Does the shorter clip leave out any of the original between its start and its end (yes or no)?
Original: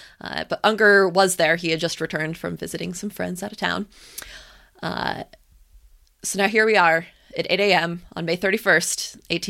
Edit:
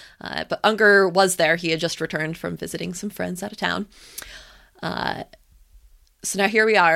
no